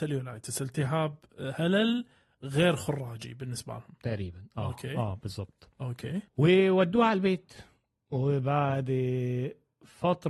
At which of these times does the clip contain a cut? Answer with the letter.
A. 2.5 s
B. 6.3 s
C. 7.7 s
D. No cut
B